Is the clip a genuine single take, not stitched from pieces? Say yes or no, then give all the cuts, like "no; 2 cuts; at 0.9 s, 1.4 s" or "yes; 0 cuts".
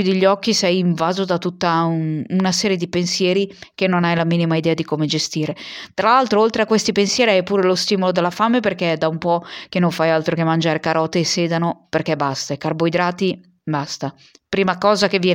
yes; 0 cuts